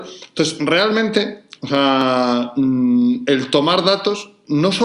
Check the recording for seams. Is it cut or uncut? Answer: uncut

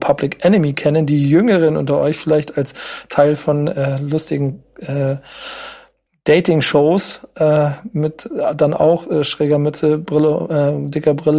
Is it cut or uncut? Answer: uncut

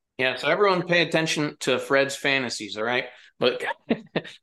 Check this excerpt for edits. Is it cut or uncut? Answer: uncut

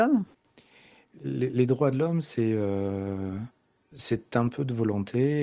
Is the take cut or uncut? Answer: uncut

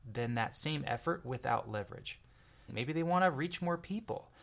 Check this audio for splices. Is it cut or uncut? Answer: cut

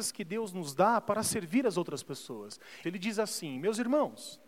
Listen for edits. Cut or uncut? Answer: cut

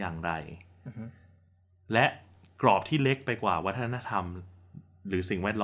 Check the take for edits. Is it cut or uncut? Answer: uncut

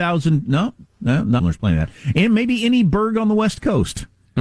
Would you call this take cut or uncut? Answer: cut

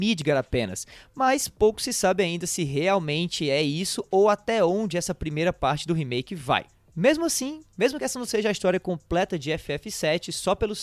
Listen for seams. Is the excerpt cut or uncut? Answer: uncut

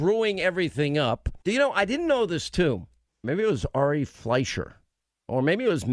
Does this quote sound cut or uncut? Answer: cut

